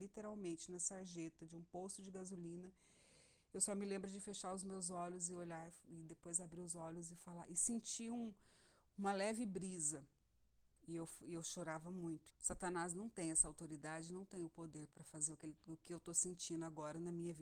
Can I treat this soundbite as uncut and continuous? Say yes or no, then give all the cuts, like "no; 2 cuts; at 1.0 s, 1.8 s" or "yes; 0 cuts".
no; 2 cuts; at 10.8 s, 12.3 s